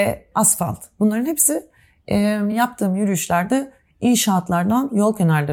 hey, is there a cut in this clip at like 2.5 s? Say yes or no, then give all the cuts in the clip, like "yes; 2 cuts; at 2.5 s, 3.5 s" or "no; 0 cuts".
no; 0 cuts